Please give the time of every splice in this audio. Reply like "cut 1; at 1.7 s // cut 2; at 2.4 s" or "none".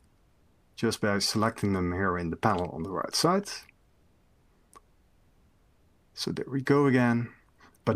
none